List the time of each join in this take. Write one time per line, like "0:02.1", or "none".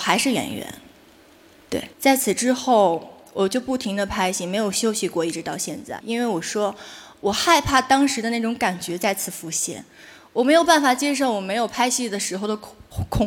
0:01.9
0:06.0